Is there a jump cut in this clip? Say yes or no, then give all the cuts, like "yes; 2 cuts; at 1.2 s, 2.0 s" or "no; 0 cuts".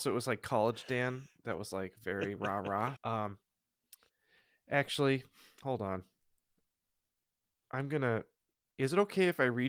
yes; 1 cut; at 3.0 s